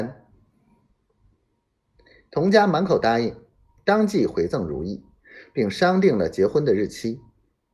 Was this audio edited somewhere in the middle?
no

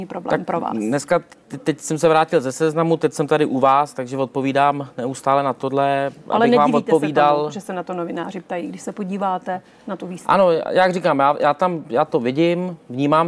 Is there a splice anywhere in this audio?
no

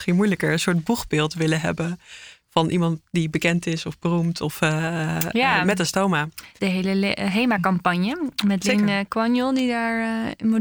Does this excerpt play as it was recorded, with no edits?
no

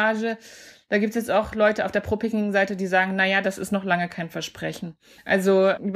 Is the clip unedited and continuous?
no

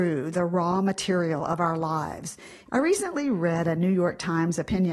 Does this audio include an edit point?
yes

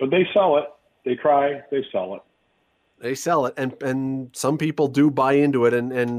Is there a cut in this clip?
no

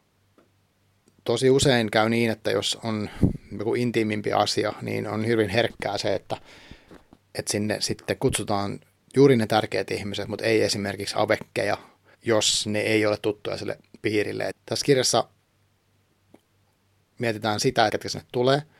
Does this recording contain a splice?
yes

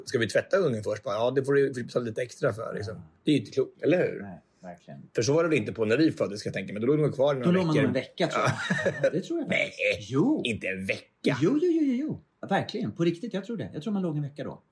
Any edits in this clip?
yes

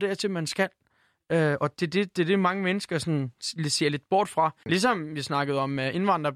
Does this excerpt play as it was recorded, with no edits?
yes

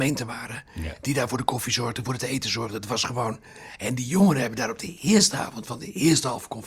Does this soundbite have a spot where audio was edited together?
yes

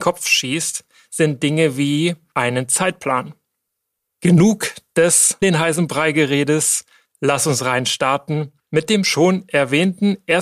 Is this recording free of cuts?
no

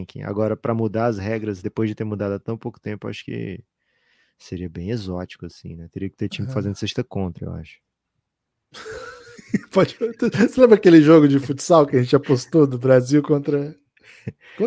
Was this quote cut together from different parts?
no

